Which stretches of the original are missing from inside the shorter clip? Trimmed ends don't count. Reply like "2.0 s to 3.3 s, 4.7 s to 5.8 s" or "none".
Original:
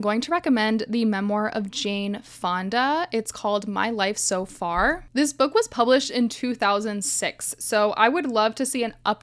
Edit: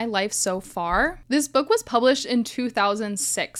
none